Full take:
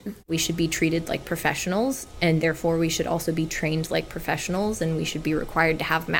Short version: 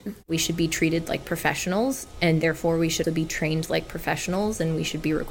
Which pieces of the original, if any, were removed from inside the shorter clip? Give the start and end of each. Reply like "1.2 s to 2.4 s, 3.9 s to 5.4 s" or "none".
3.0 s to 3.2 s